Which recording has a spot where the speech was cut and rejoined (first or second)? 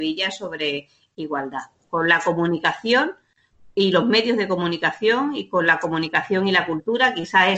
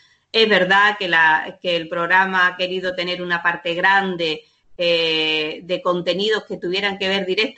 first